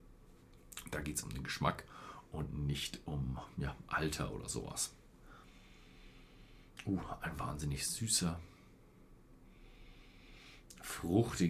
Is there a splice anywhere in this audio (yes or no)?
no